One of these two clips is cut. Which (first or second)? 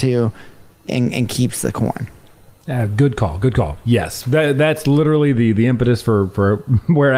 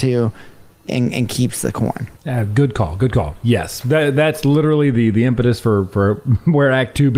second